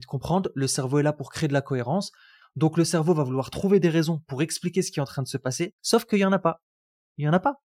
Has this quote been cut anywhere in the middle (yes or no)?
yes